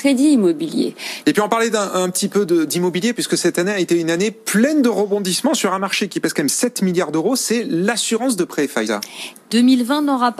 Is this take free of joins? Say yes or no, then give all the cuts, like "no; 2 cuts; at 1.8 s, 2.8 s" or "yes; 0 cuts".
no; 2 cuts; at 1.2 s, 9.3 s